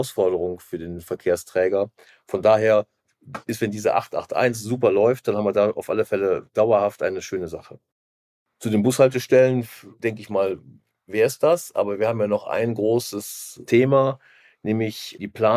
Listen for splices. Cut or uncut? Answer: uncut